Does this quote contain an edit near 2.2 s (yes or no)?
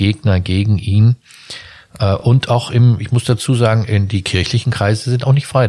no